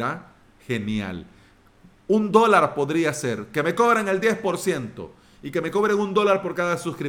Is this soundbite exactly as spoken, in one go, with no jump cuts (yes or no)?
yes